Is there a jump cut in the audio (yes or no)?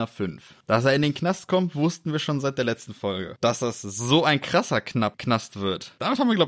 no